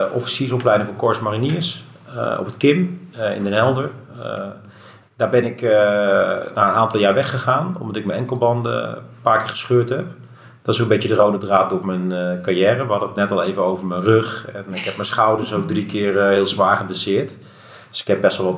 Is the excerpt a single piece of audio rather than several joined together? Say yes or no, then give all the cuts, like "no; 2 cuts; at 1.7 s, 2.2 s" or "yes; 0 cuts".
yes; 0 cuts